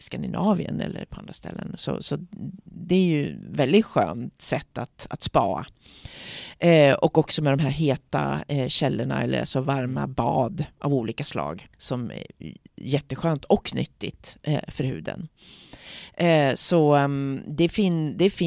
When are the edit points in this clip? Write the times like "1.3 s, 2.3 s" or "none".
11.7 s